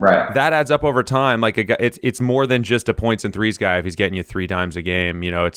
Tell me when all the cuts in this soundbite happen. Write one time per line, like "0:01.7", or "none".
none